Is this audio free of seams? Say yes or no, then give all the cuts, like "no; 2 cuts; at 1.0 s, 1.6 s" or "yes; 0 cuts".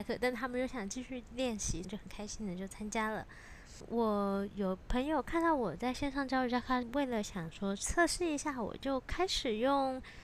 no; 2 cuts; at 1.8 s, 6.8 s